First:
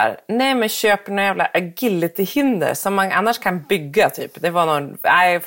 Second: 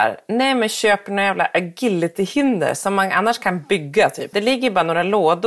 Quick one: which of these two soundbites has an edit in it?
second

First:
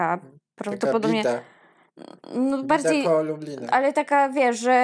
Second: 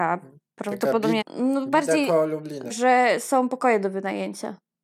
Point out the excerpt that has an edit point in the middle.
second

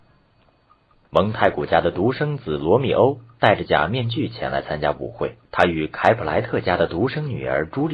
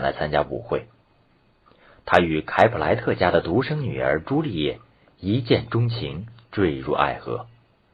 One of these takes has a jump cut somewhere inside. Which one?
first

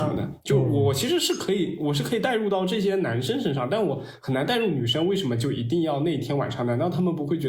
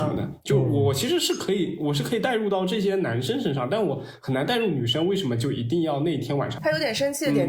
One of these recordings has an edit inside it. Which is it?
second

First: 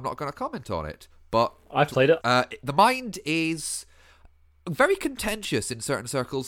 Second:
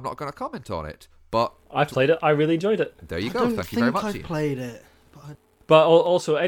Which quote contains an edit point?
first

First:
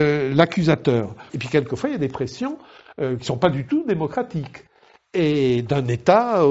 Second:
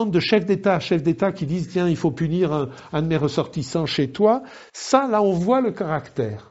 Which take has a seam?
first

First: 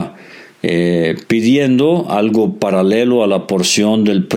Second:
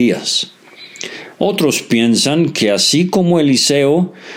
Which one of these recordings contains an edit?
second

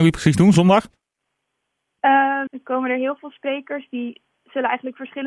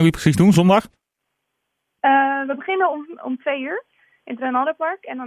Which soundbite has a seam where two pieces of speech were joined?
first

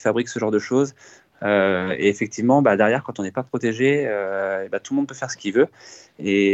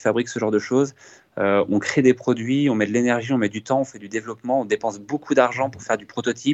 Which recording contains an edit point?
first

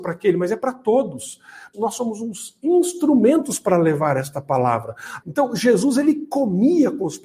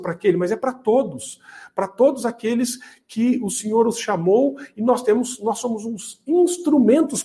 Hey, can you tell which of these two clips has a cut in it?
first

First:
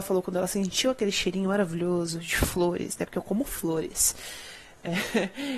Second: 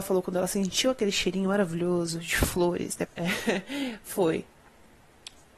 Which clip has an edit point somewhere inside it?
second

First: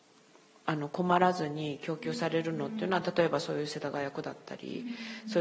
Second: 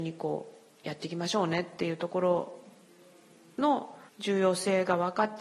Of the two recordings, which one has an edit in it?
second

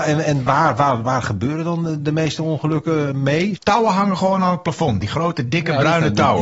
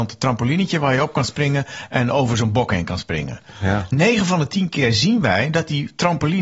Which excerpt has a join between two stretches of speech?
first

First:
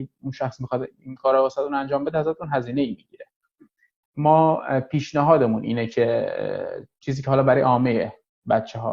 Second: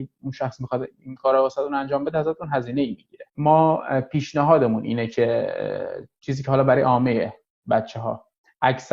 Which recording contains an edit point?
second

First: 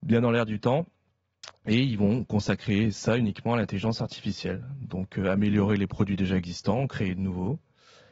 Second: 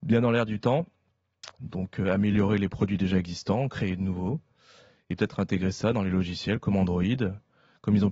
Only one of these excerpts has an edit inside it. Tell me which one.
second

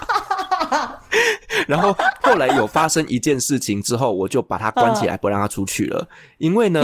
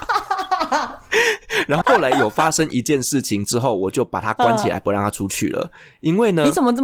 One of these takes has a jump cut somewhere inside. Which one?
second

